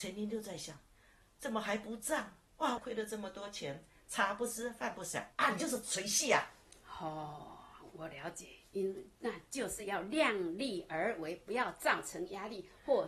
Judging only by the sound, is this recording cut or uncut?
cut